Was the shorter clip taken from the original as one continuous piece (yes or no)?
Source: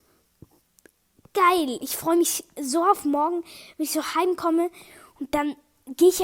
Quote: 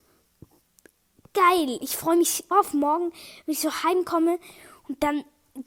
no